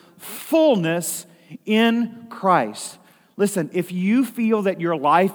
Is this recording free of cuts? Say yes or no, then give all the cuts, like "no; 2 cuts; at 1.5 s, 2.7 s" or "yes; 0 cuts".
yes; 0 cuts